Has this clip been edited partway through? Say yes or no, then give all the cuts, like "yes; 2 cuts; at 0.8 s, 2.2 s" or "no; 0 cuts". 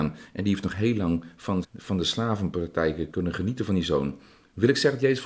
yes; 2 cuts; at 1.6 s, 3.1 s